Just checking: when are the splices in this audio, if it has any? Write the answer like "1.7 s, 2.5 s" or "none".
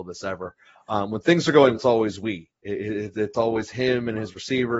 1.7 s